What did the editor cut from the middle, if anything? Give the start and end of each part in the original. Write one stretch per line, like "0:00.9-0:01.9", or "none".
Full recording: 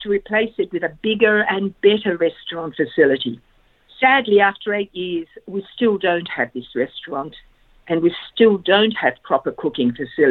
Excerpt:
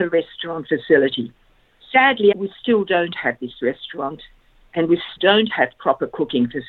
0:04.4-0:05.4
0:08.3-0:08.6